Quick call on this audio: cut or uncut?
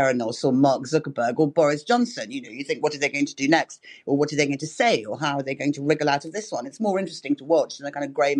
uncut